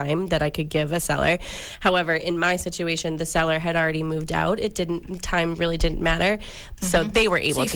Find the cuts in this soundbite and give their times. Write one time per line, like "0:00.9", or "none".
0:06.8